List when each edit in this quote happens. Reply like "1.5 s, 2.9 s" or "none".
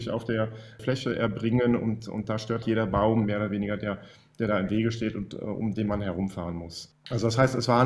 2.6 s